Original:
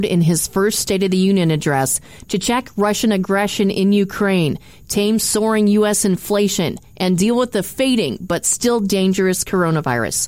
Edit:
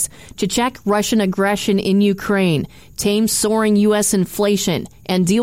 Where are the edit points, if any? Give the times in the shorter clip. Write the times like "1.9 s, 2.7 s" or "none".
none